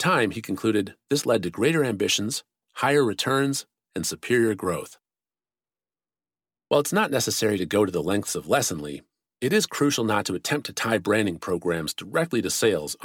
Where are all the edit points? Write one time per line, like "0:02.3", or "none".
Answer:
0:06.6